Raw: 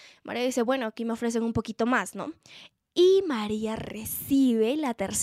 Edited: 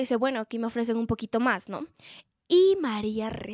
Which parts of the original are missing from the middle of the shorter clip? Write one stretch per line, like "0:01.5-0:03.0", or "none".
none